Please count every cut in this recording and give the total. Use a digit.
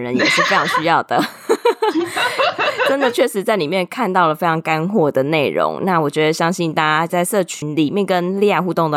0